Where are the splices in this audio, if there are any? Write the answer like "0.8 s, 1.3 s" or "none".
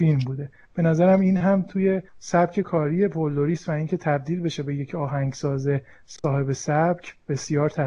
2.1 s